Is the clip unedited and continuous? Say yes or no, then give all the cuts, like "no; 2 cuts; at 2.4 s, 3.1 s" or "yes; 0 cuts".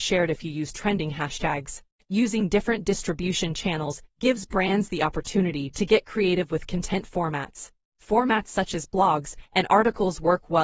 yes; 0 cuts